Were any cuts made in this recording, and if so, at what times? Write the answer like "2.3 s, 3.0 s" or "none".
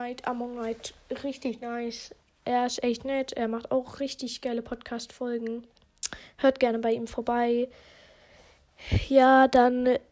none